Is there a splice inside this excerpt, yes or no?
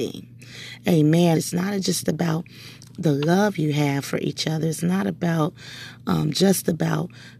yes